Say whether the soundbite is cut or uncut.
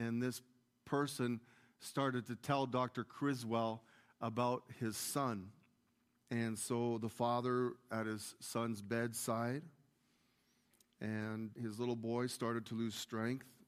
cut